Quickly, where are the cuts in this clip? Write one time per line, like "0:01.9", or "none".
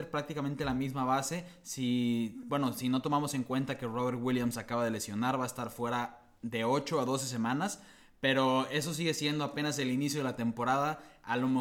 none